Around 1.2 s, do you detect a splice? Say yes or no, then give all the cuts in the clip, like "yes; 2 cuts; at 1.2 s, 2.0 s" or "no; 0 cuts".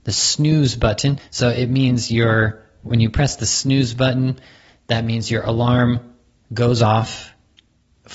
yes; 1 cut; at 1.2 s